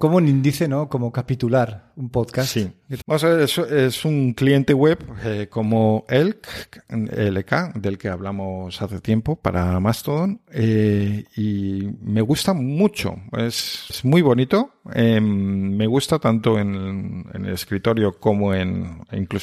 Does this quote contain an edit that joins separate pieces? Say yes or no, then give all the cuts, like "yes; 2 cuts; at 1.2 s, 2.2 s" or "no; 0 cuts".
yes; 2 cuts; at 3.0 s, 13.9 s